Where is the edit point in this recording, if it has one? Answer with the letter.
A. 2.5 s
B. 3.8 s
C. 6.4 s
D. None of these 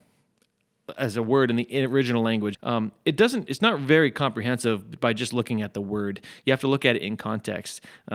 A